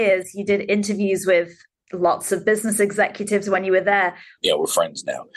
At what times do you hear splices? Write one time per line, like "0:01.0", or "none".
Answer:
0:04.4